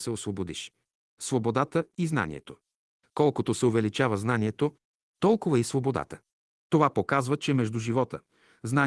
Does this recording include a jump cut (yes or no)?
no